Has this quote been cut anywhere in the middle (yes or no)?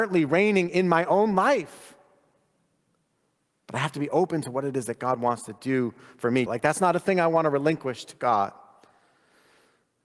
yes